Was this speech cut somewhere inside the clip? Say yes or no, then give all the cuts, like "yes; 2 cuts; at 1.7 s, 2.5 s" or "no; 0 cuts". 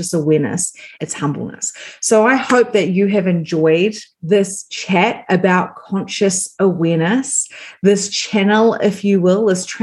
yes; 2 cuts; at 0.9 s, 4.1 s